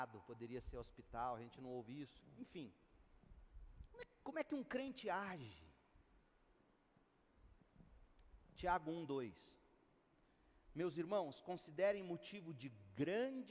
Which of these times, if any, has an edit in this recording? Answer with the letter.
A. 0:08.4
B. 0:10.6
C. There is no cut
C